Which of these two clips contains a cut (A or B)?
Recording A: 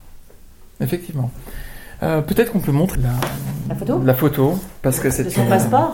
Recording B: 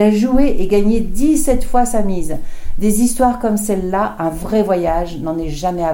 A